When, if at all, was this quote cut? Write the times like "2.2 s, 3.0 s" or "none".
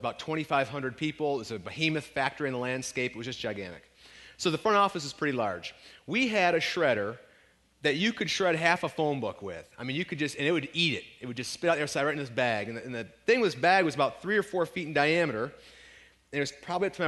none